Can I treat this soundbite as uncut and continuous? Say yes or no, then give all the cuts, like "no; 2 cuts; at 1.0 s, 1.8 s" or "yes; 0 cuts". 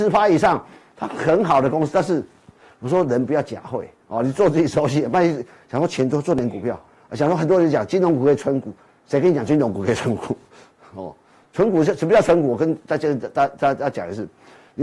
yes; 0 cuts